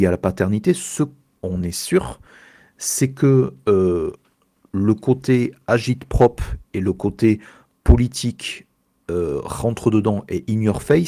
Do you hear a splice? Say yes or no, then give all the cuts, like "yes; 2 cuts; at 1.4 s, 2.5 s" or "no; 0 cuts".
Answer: yes; 1 cut; at 1.4 s